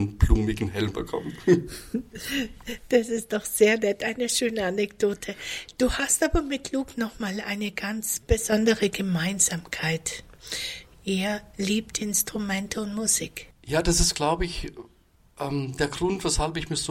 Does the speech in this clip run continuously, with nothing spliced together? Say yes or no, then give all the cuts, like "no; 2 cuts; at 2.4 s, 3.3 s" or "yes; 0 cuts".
yes; 0 cuts